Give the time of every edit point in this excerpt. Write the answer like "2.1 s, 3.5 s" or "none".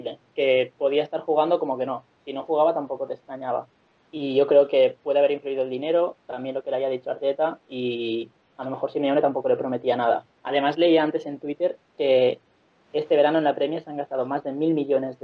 none